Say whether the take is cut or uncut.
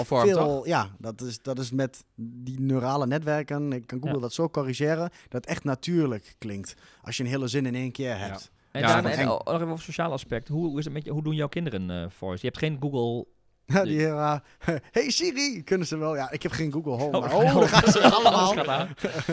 uncut